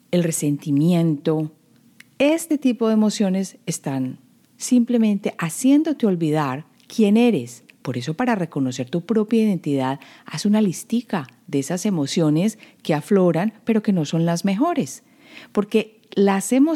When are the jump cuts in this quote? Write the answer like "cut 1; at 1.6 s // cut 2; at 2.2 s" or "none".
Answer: none